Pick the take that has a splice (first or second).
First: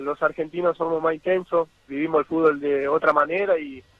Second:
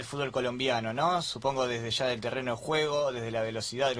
first